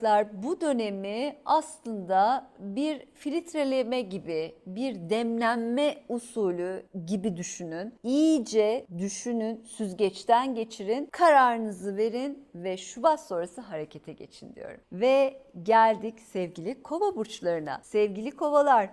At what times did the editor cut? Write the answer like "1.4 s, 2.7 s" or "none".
none